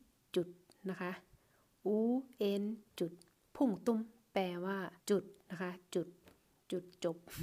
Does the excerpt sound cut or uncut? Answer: cut